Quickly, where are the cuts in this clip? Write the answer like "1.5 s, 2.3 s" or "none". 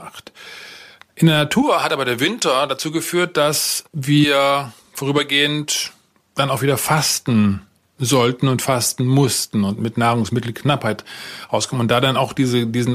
3.9 s